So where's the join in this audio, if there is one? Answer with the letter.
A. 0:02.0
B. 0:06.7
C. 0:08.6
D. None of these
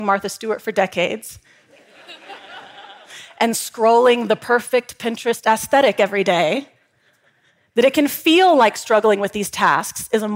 D